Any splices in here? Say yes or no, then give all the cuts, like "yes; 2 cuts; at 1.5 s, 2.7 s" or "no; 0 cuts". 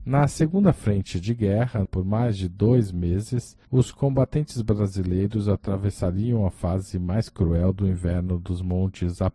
yes; 1 cut; at 1.9 s